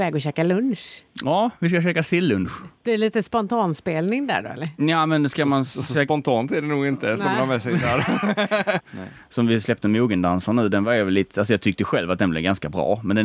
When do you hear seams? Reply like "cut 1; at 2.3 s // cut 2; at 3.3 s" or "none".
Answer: cut 1; at 8.8 s